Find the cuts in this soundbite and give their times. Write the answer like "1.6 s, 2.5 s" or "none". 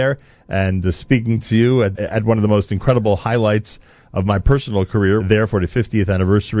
1.9 s, 5.2 s